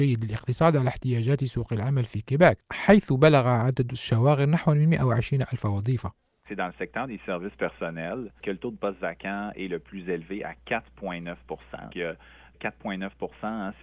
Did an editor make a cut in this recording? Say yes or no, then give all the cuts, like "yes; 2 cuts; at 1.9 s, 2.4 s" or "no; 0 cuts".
yes; 1 cut; at 11.9 s